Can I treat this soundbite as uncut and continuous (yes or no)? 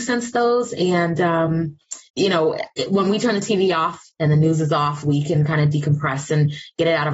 no